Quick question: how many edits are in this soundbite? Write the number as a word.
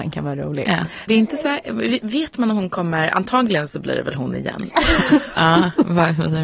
two